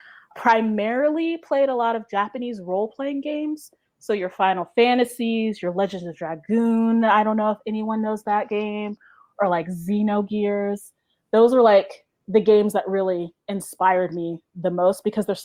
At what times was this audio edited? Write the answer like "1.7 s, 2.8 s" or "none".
none